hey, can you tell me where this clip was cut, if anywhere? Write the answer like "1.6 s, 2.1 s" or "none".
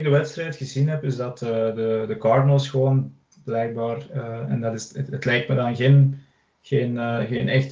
none